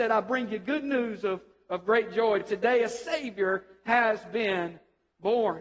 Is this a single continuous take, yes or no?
yes